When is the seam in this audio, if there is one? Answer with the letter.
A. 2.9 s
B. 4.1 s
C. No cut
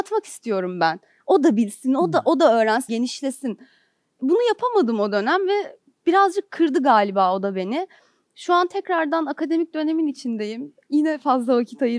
A